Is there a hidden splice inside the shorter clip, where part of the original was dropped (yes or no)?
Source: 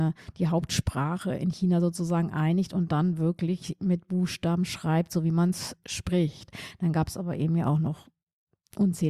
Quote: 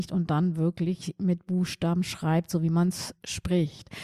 no